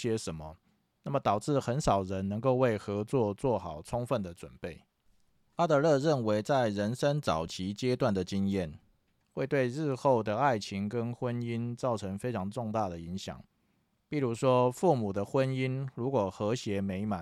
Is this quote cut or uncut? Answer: uncut